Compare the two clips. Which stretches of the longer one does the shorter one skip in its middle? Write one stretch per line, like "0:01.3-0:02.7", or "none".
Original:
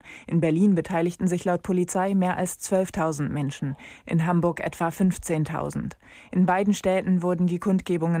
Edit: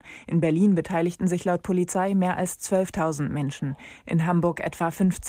none